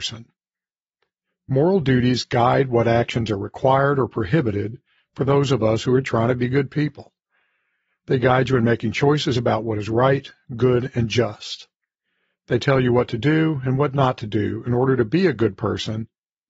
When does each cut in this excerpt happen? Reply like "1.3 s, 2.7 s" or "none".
none